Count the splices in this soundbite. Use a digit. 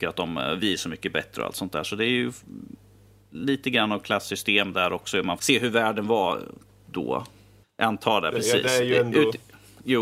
2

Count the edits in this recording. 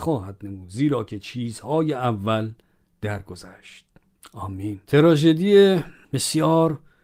1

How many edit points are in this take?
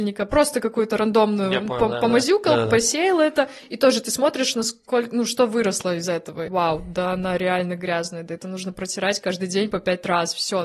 1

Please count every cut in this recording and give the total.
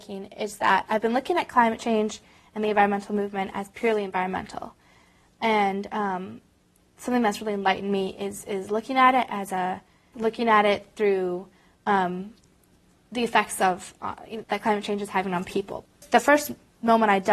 2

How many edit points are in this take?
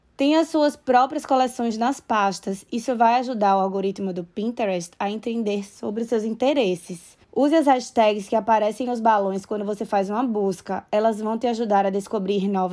1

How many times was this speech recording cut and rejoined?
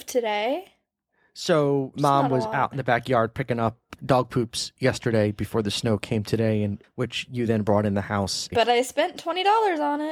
2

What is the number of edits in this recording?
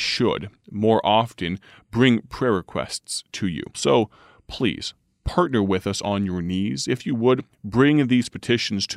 1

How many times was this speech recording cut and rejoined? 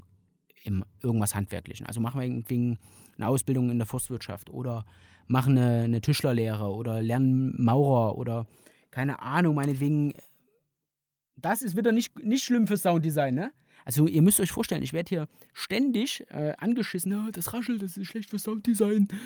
0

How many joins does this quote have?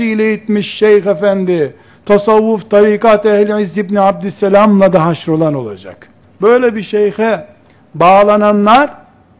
1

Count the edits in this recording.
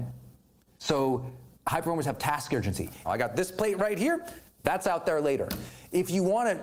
1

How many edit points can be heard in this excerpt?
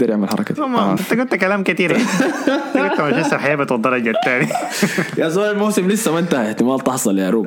1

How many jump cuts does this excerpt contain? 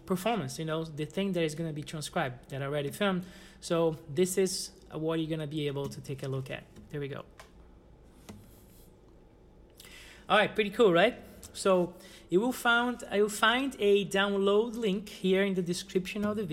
0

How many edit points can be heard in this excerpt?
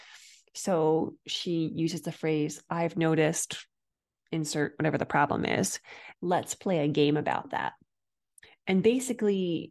1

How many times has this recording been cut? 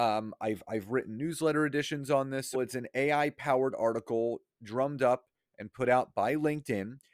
1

